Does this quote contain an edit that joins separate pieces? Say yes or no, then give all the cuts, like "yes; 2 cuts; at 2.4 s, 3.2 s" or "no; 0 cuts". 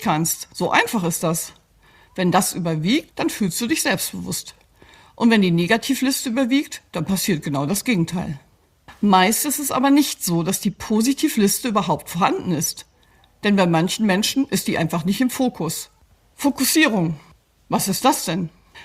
yes; 1 cut; at 3.1 s